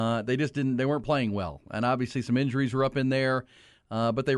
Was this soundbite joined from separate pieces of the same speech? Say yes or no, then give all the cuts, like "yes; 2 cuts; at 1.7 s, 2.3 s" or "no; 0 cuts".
no; 0 cuts